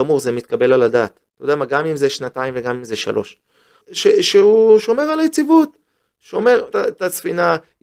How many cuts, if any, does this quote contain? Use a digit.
3